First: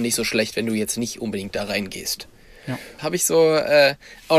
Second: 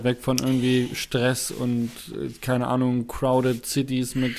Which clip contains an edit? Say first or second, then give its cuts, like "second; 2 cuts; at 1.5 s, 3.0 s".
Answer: first; 1 cut; at 3.0 s